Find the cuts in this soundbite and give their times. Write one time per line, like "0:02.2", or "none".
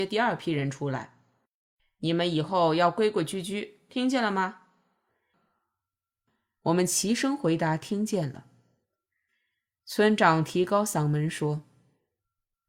none